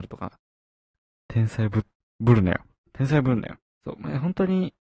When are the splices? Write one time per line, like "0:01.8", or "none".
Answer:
0:01.2